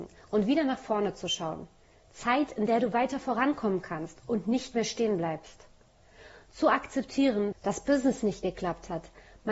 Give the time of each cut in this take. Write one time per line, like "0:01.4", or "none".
0:02.0
0:07.5